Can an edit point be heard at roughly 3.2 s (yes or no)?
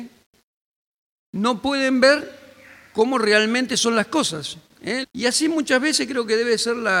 no